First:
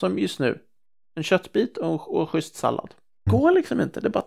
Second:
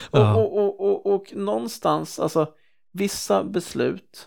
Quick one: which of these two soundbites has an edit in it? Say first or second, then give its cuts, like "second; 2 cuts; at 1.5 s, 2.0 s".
first; 1 cut; at 3.3 s